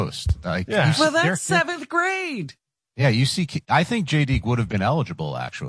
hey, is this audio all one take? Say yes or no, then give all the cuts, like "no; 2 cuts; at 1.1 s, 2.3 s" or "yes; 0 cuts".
yes; 0 cuts